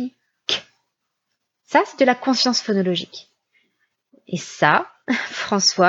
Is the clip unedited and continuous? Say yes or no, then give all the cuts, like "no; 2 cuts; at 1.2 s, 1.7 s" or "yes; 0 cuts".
yes; 0 cuts